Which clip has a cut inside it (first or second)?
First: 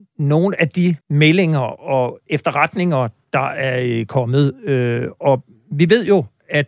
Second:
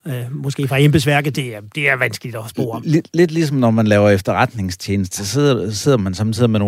first